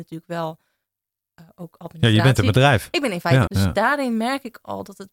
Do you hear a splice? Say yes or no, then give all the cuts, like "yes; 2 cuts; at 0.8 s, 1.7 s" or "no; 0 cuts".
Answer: yes; 1 cut; at 3.5 s